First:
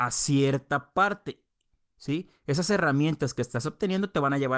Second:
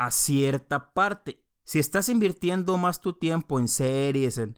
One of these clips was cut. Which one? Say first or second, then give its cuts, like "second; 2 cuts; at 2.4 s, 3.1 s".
second; 1 cut; at 1.6 s